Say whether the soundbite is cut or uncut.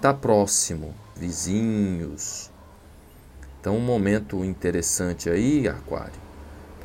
cut